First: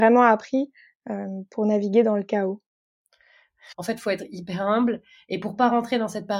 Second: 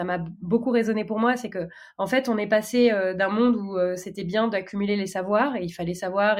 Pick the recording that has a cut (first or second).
first